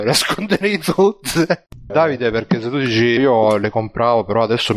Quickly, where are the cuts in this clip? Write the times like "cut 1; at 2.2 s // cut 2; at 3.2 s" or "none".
cut 1; at 1.9 s // cut 2; at 3.2 s